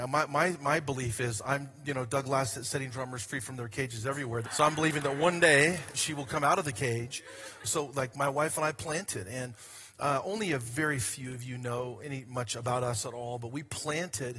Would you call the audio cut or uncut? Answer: cut